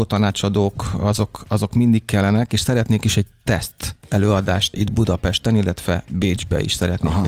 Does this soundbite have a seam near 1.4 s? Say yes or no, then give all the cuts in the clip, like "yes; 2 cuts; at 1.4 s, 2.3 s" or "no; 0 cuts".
no; 1 cut; at 4.7 s